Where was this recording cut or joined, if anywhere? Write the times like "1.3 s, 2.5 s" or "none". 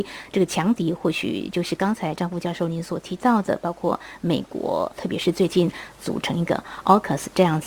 4.9 s